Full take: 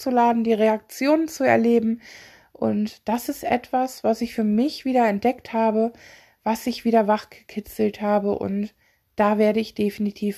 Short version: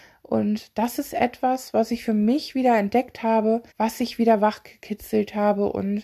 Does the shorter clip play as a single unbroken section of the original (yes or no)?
no